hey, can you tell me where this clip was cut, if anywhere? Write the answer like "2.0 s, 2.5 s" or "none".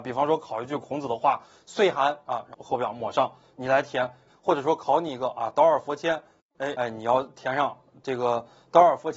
2.5 s, 4.3 s, 6.7 s